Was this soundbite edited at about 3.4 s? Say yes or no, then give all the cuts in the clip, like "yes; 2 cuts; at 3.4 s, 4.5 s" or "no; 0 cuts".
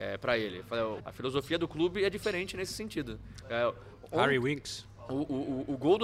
yes; 2 cuts; at 1.0 s, 3.4 s